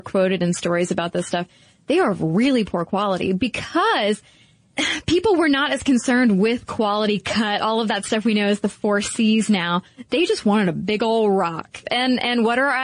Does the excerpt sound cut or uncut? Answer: cut